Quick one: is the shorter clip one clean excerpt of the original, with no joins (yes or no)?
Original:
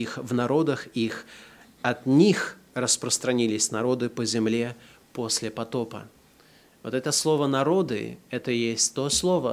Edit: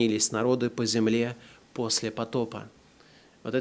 yes